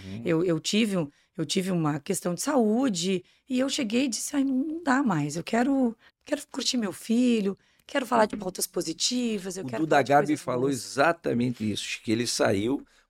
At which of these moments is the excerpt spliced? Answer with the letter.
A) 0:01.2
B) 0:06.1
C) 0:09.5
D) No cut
B